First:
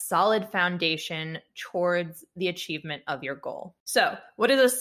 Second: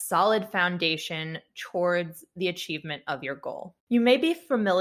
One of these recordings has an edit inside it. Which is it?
second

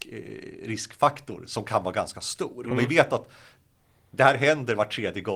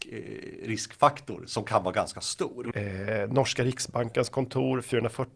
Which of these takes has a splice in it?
second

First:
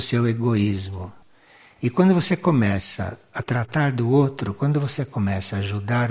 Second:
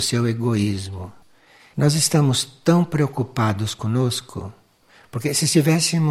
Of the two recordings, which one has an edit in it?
second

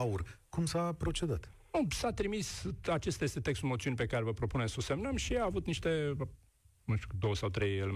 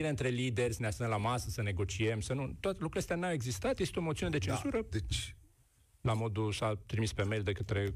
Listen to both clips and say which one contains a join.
second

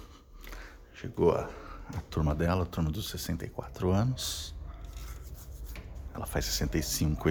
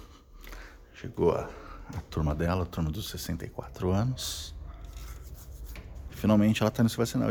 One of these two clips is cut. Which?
second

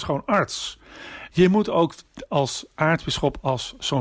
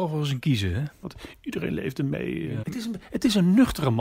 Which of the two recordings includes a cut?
second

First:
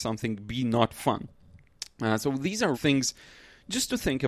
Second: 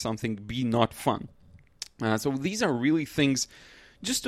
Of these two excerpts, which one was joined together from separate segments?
first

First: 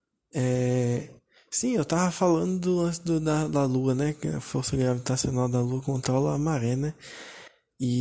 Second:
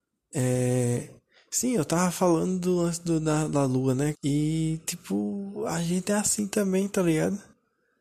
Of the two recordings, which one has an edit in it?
second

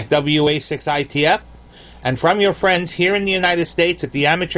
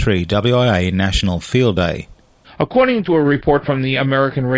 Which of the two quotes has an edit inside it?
second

